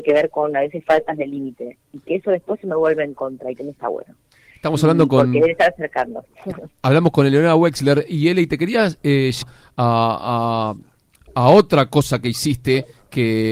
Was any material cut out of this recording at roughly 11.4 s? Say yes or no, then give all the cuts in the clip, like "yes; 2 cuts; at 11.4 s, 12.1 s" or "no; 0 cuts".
no; 1 cut; at 9.4 s